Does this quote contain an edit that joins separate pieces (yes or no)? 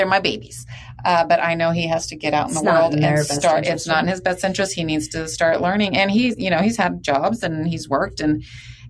no